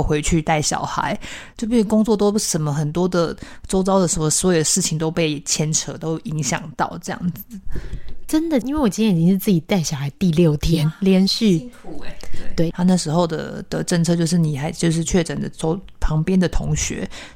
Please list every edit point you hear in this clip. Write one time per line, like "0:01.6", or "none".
0:08.6
0:12.7

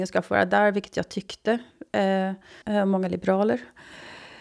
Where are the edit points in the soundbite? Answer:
0:02.6

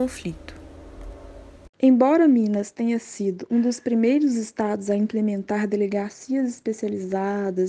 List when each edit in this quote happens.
0:01.7

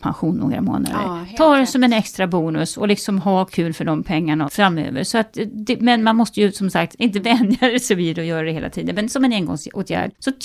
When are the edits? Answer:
0:04.5
0:06.9

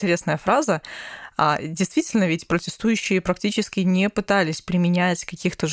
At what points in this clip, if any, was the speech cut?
none

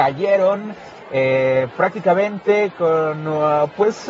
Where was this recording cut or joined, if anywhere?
none

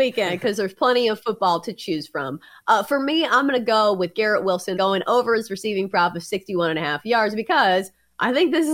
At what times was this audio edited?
0:04.8

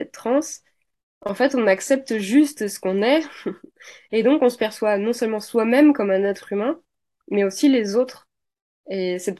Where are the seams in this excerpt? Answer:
none

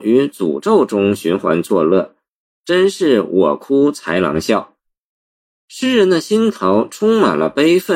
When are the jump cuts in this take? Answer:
none

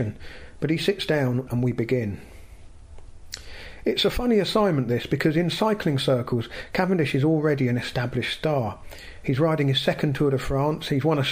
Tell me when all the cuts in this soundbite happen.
0:01.5
0:09.2

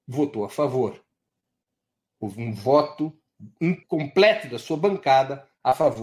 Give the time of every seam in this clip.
0:03.8

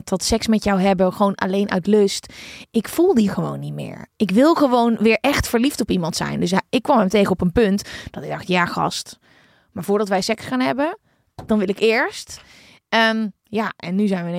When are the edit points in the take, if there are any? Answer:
none

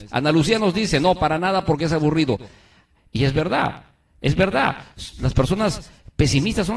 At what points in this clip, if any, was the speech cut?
none

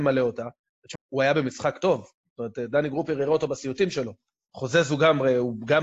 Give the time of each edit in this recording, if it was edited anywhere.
0:01.0
0:04.5

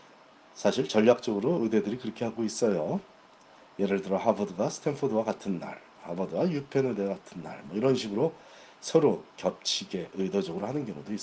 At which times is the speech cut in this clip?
none

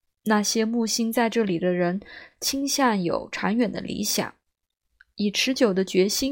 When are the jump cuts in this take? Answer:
none

